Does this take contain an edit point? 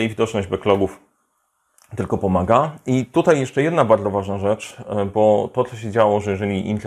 no; 0 cuts

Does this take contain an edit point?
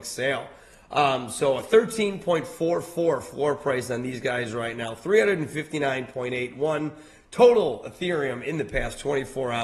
no; 0 cuts

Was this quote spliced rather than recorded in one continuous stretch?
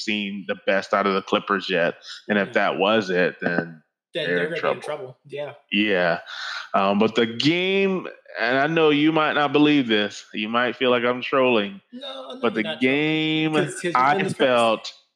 no; 0 cuts

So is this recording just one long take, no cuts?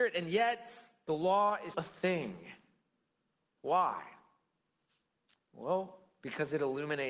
no; 1 cut; at 1.7 s

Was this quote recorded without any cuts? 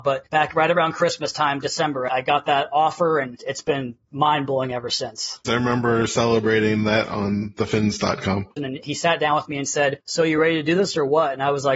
no; 2 cuts; at 5.4 s, 8.6 s

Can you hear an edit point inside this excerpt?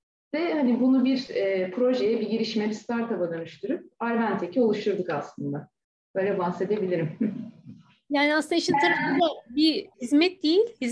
no; 0 cuts

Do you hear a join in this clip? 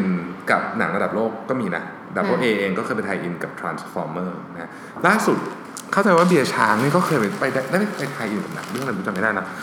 no; 0 cuts

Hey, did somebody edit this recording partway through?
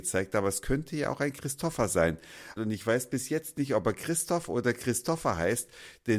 yes; 1 cut; at 2.6 s

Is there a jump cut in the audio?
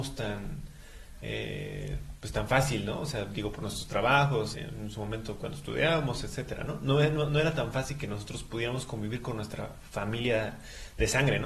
yes; 1 cut; at 4.5 s

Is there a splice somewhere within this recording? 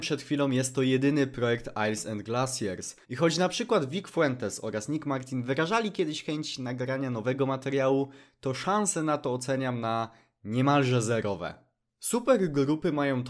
yes; 1 cut; at 3.0 s

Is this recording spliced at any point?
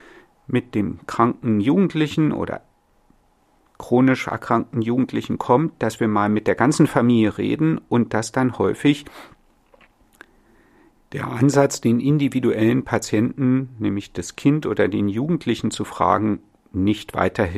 no; 0 cuts

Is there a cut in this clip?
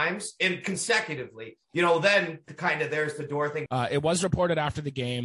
yes; 2 cuts; at 2.5 s, 3.7 s

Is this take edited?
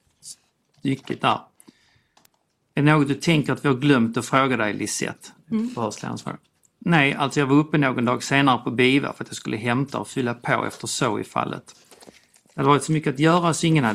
no; 0 cuts

